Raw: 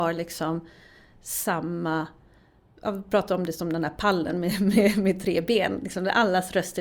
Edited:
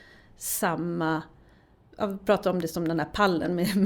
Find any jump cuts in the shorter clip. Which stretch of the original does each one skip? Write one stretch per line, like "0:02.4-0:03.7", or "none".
none